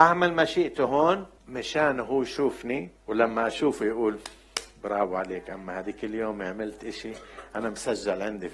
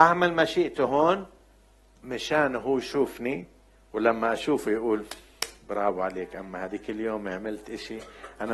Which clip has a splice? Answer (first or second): first